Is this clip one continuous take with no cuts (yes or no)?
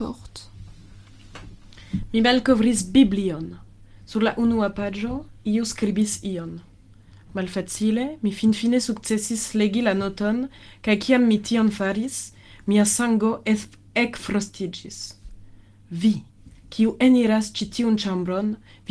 yes